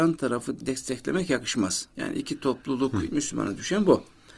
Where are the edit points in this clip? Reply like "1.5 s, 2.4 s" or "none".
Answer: 1.9 s, 3.1 s